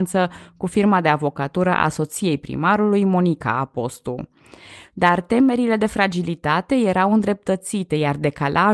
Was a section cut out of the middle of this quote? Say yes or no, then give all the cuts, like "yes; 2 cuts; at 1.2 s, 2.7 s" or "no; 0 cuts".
yes; 1 cut; at 4.9 s